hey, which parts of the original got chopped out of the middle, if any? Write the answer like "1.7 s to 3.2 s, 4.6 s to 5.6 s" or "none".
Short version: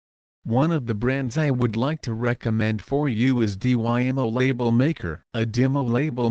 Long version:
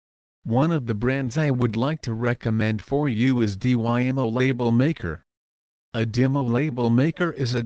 5.3 s to 5.9 s